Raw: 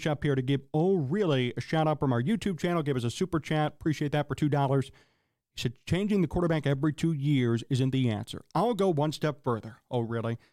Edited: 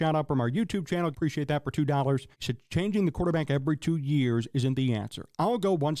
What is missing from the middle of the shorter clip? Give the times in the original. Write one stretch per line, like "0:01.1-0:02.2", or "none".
0:02.8-0:03.7
0:05.0-0:05.5